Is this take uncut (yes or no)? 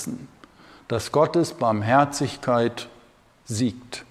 yes